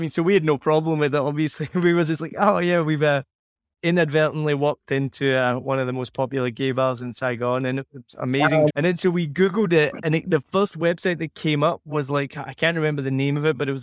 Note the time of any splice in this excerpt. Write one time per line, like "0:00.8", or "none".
0:08.7